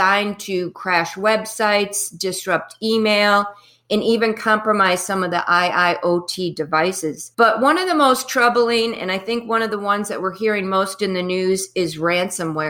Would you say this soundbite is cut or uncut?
uncut